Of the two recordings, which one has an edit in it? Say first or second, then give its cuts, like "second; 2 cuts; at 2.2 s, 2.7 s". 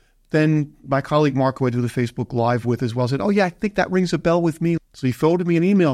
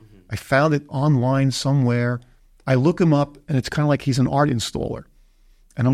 first; 1 cut; at 4.8 s